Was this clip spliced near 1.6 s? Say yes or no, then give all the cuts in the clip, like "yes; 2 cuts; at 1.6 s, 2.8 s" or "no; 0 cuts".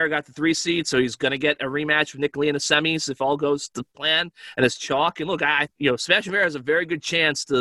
no; 1 cut; at 5.7 s